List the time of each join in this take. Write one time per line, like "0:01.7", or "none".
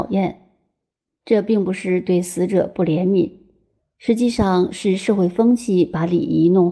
0:03.8